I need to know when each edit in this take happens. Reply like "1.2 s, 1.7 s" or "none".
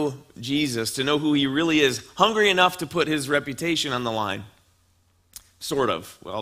none